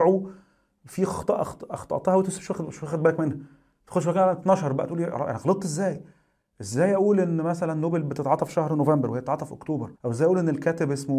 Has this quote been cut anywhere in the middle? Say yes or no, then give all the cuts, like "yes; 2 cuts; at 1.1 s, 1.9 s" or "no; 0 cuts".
yes; 1 cut; at 10.0 s